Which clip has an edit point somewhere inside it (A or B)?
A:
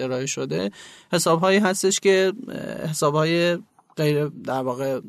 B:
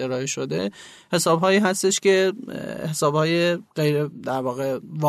B